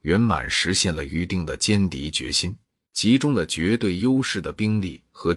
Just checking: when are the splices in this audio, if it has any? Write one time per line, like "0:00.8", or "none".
0:02.9